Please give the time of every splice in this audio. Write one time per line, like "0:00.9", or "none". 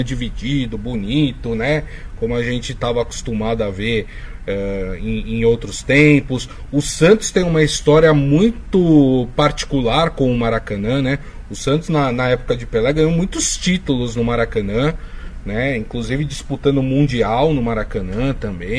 none